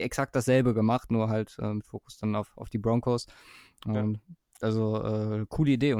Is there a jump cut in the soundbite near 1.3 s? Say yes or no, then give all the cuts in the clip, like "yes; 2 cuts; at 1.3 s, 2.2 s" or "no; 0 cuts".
no; 0 cuts